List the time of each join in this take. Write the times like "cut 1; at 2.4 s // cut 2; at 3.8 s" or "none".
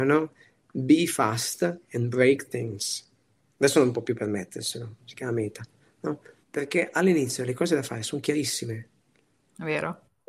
cut 1; at 5.0 s // cut 2; at 6.4 s